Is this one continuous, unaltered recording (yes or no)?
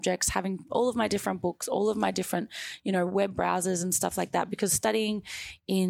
yes